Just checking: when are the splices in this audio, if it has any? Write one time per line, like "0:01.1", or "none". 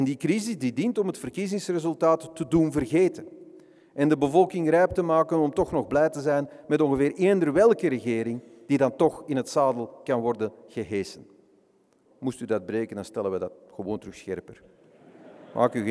0:12.1

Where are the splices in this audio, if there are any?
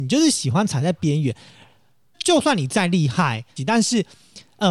0:02.1
0:03.6

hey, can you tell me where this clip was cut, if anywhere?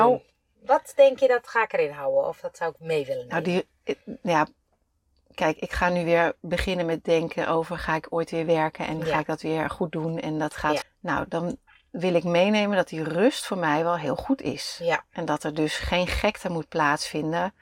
0:10.8

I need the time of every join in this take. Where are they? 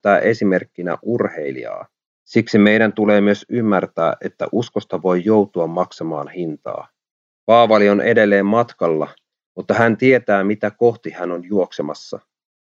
0:02.1
0:07.3

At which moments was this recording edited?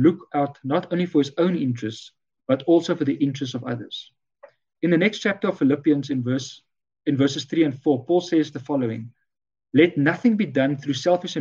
0:04.8

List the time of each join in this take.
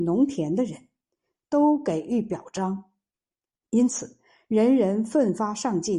none

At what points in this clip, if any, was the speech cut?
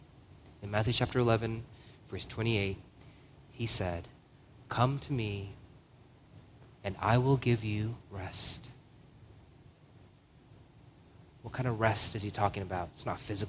0:06.7
0:08.0

